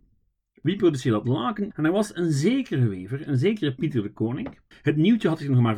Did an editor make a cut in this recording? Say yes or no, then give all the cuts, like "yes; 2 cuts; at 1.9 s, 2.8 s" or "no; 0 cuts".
yes; 2 cuts; at 1.7 s, 4.7 s